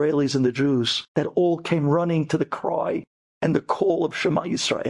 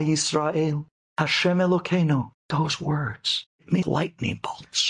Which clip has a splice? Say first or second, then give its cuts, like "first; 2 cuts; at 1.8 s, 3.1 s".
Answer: second; 2 cuts; at 2.3 s, 3.8 s